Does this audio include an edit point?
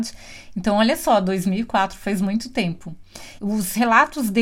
yes; 1 cut; at 3.4 s

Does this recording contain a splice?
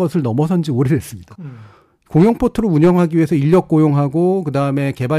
yes; 1 cut; at 1.4 s

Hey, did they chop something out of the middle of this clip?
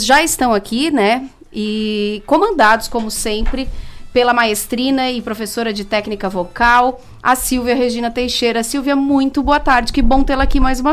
no; 0 cuts

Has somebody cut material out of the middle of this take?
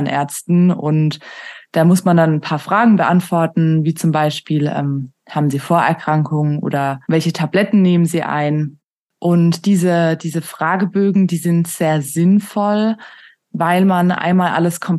yes; 1 cut; at 7.0 s

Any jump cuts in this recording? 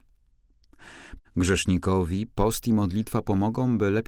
yes; 1 cut; at 1.2 s

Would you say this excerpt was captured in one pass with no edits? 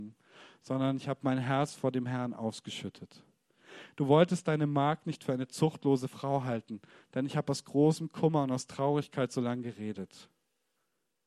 yes; 0 cuts

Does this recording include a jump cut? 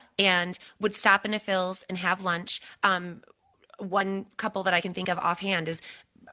no; 0 cuts

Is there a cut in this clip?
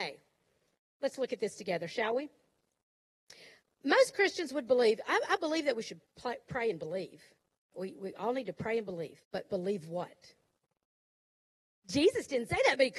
yes; 3 cuts; at 7.7 s, 9.2 s, 11.8 s

